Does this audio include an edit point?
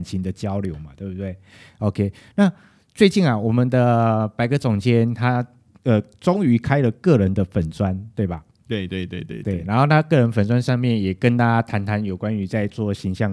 no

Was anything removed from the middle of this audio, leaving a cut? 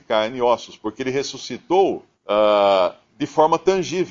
yes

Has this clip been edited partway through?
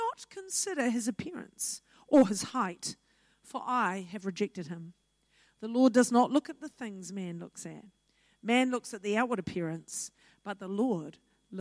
no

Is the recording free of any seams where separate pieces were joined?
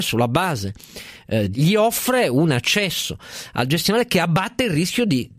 no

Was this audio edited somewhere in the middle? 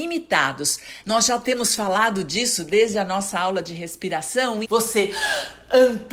yes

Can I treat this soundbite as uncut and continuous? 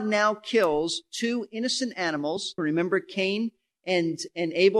no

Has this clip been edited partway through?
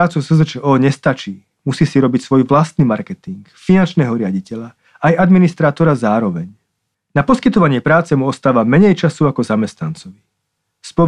no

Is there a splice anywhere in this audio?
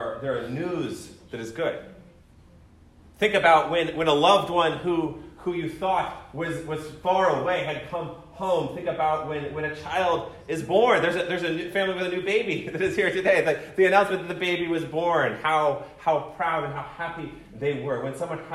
no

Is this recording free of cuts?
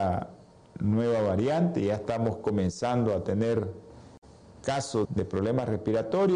no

